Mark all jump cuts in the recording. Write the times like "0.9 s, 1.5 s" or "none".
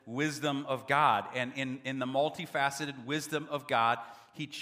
none

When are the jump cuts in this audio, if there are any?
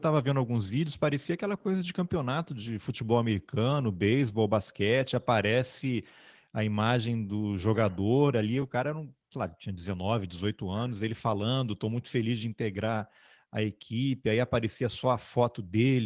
none

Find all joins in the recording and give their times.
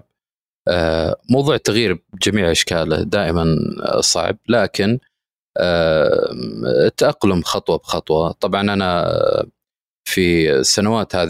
1.6 s

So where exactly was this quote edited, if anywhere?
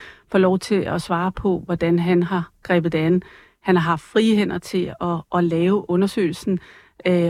none

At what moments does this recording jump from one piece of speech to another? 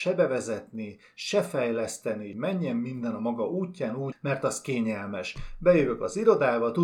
2.3 s, 4.1 s

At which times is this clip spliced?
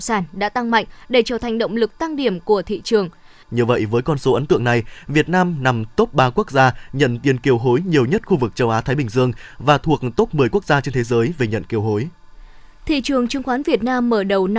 3.4 s

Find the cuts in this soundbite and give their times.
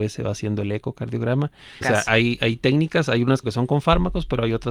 1.8 s, 3.4 s

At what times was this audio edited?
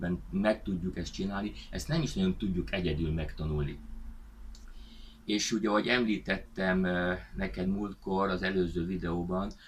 none

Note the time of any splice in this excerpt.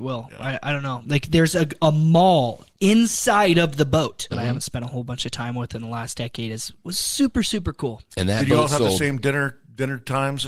1.0 s, 4.3 s

